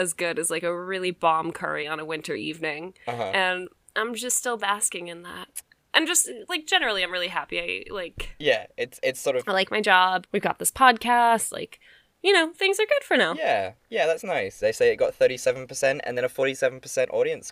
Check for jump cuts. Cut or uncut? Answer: cut